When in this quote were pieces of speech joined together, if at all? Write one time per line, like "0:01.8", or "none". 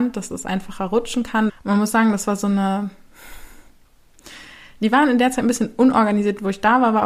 0:01.5